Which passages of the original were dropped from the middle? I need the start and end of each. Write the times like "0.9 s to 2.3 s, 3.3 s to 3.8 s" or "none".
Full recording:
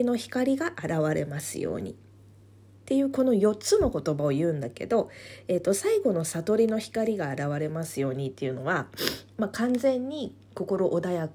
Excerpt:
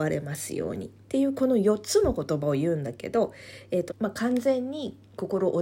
2.0 s to 2.8 s, 5.6 s to 9.3 s